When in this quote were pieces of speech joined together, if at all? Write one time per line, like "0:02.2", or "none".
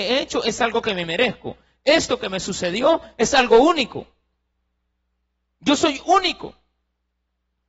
none